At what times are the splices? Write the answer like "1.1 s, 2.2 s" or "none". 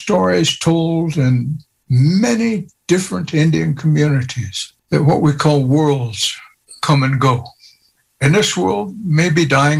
4.8 s